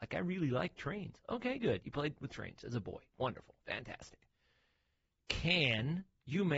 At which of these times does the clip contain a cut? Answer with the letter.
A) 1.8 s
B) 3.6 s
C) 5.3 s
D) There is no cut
A